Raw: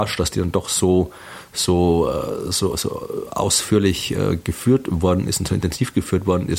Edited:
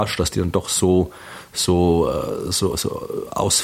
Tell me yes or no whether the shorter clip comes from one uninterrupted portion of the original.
yes